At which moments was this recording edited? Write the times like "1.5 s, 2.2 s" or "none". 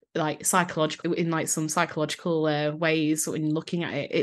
1.0 s